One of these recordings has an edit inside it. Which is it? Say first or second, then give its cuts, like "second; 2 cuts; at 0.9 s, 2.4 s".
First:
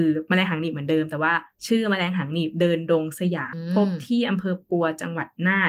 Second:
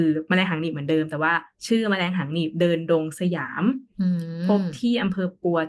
first; 1 cut; at 3.5 s